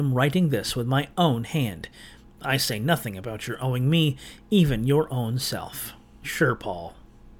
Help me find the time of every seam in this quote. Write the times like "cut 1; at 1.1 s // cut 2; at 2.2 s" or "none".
cut 1; at 2.3 s // cut 2; at 6.2 s